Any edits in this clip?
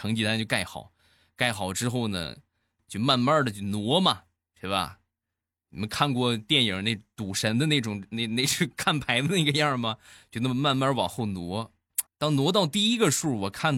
yes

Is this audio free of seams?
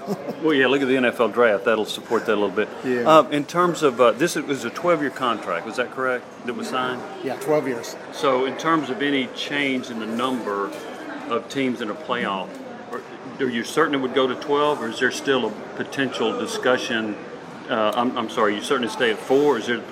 yes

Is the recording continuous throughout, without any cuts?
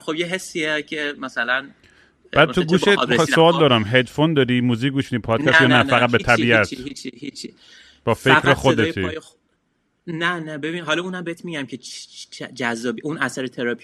yes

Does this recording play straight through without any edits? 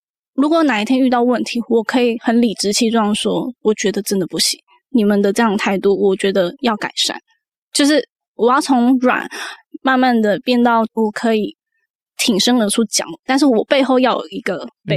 yes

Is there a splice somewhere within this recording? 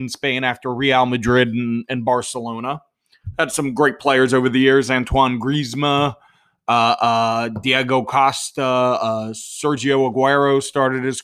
no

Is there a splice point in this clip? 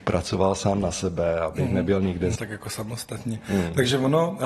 yes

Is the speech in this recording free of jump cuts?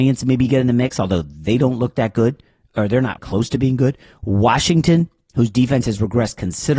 no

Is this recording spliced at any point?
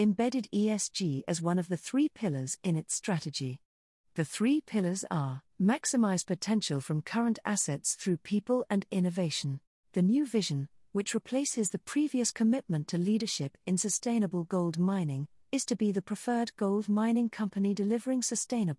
yes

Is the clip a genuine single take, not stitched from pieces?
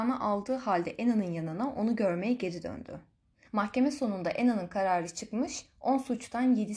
no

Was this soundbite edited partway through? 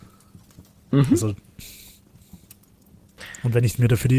no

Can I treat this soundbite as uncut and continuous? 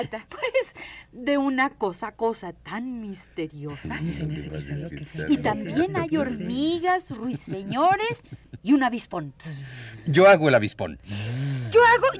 yes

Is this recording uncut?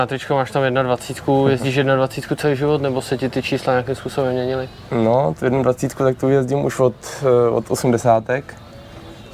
yes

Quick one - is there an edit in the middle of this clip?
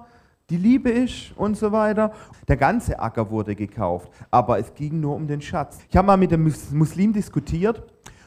yes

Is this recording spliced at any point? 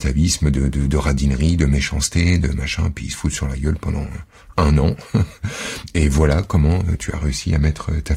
no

